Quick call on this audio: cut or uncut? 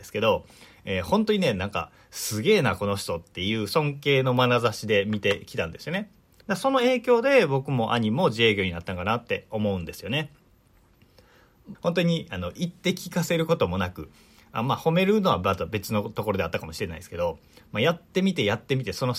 cut